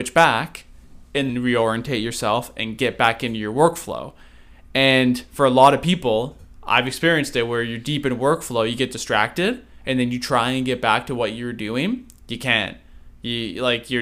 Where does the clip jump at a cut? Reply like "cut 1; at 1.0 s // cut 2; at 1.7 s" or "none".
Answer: cut 1; at 1.3 s